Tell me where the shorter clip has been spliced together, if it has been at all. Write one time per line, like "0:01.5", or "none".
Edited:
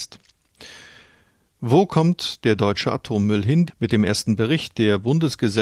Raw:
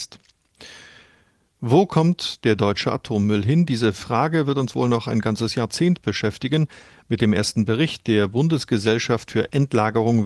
0:03.7